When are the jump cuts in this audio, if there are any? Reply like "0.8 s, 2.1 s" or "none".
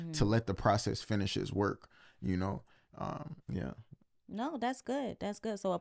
3.4 s